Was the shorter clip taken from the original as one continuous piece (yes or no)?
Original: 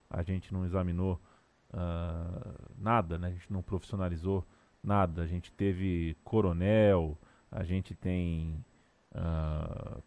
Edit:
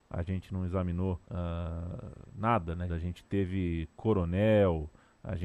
no